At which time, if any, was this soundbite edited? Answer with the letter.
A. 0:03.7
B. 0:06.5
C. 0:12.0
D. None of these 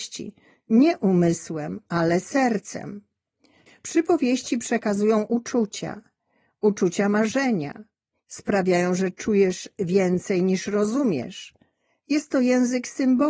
A